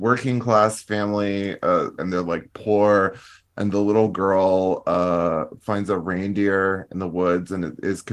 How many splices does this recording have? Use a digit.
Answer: 1